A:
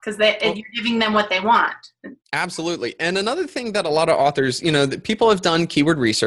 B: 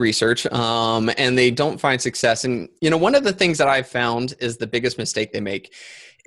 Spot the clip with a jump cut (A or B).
A